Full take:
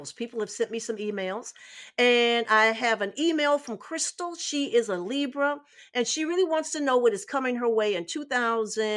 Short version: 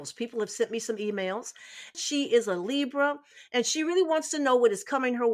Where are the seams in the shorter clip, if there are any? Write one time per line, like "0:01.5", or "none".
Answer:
0:01.9